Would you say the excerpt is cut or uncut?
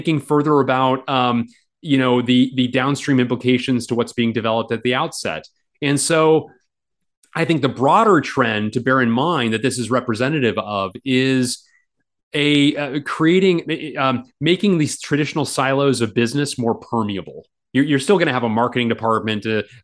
uncut